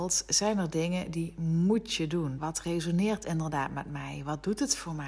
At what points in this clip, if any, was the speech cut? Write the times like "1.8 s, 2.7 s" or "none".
2.4 s